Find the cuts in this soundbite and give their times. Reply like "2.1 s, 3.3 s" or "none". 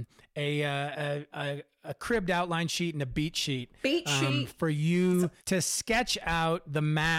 1.3 s, 5.4 s